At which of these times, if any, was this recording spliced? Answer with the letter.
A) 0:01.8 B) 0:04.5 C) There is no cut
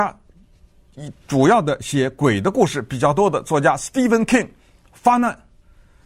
C